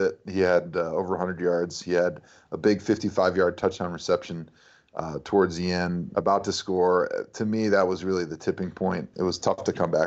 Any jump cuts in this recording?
yes; 2 cuts; at 6.1 s, 9.1 s

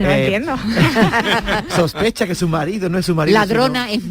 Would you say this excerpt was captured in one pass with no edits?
yes; 0 cuts

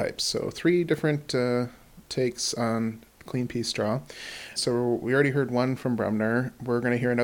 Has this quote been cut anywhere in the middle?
yes; 1 cut; at 4.6 s

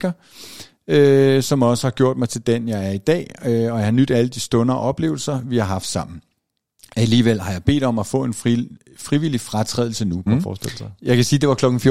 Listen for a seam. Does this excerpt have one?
yes; 1 cut; at 10.3 s

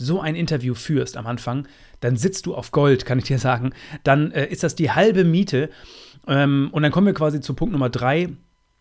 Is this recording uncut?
yes; 0 cuts

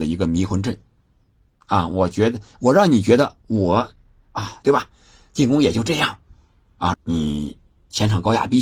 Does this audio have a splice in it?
yes; 2 cuts; at 4.6 s, 6.9 s

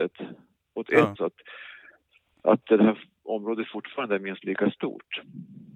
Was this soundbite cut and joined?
yes; 1 cut; at 1.2 s

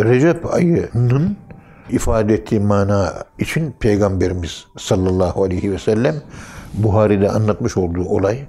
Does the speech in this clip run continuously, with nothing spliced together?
yes; 0 cuts

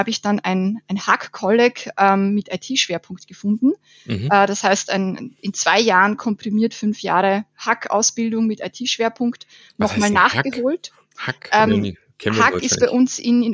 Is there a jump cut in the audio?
no; 0 cuts

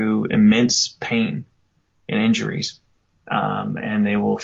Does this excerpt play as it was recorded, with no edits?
yes; 0 cuts

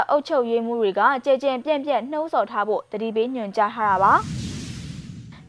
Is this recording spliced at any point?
no; 0 cuts

